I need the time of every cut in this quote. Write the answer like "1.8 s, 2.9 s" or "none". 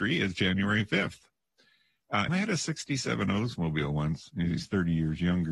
2.3 s, 4.3 s